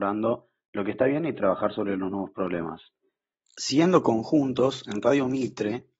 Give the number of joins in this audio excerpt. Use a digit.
1